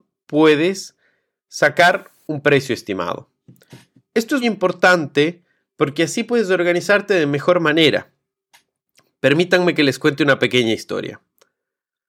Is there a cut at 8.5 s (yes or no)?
no